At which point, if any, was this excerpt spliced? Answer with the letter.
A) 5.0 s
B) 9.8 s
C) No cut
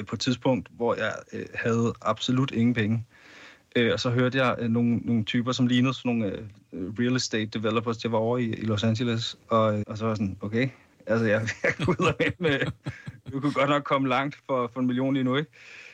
B